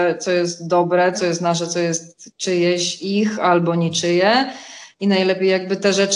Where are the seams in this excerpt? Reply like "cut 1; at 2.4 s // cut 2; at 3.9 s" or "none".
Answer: cut 1; at 1.1 s